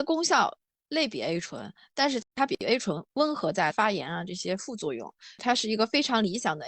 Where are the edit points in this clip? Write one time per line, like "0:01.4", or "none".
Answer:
0:02.2
0:03.7